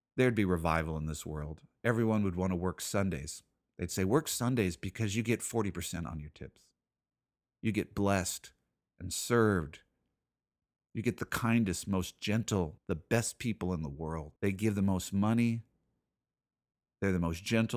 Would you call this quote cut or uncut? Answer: cut